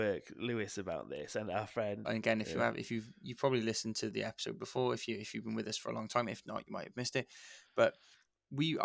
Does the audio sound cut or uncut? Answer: cut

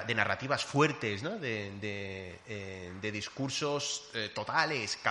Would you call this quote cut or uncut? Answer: uncut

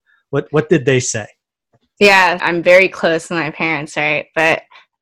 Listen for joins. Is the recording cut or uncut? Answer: cut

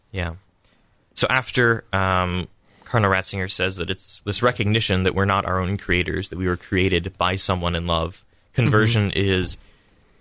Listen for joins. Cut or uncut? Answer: uncut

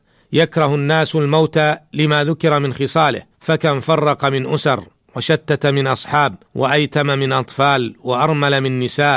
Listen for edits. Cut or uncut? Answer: cut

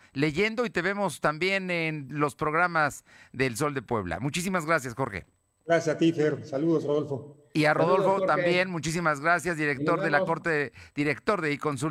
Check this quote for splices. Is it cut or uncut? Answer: uncut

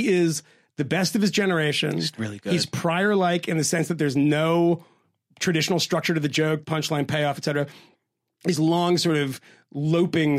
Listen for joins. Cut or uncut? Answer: cut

